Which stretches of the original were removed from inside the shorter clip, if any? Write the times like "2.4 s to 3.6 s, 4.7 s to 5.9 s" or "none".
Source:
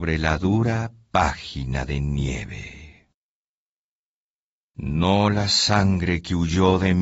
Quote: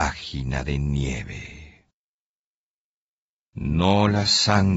none